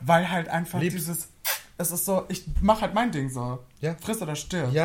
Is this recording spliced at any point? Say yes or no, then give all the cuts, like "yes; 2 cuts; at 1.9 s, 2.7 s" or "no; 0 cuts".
no; 0 cuts